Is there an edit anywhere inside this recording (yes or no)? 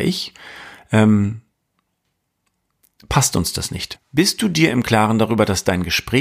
yes